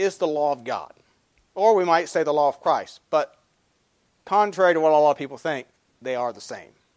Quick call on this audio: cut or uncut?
uncut